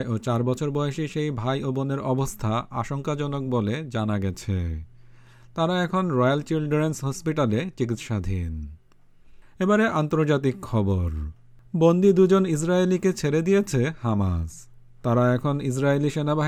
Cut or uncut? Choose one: uncut